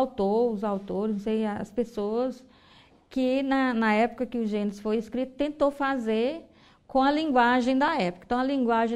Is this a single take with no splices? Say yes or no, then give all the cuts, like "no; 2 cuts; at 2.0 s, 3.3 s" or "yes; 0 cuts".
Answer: yes; 0 cuts